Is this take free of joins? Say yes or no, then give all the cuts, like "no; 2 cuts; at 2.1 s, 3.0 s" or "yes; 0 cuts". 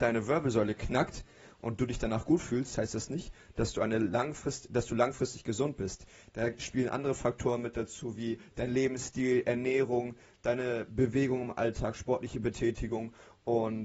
yes; 0 cuts